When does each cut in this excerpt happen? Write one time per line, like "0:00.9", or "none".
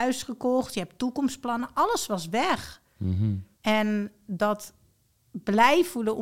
0:03.5